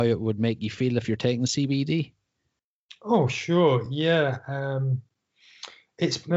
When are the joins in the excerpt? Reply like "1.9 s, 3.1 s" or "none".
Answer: none